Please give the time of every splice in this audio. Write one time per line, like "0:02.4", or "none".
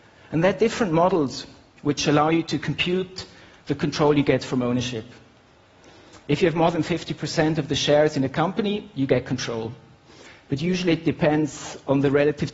none